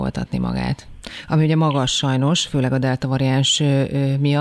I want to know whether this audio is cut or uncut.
uncut